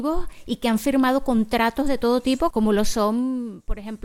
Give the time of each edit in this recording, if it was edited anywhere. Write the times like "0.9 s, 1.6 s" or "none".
2.5 s